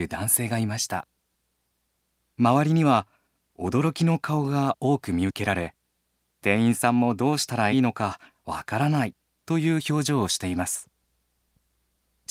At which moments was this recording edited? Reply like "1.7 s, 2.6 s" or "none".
7.7 s